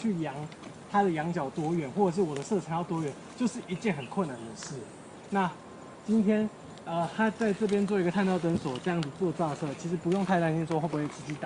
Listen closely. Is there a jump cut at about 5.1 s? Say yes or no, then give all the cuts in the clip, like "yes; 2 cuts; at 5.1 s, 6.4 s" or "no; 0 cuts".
no; 0 cuts